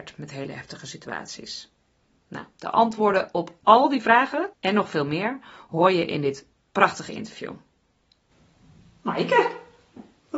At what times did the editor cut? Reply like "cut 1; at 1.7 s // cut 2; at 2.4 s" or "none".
cut 1; at 4.5 s